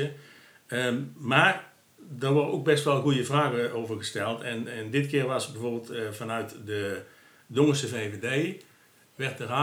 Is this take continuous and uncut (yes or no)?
yes